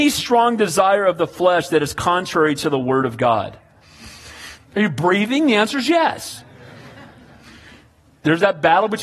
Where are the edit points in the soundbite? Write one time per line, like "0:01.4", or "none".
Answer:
0:04.6